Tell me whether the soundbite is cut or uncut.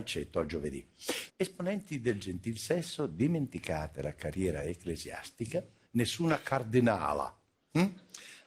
cut